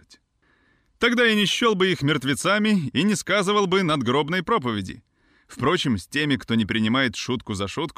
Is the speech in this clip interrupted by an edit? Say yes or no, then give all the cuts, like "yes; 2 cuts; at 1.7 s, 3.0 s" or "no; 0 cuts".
no; 0 cuts